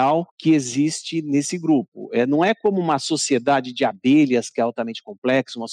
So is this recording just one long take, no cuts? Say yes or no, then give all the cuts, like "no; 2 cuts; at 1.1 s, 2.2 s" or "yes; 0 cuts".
yes; 0 cuts